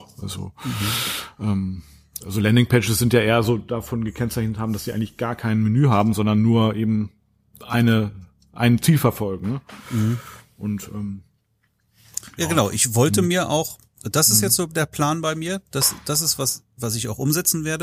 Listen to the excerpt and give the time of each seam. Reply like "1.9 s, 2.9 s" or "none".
none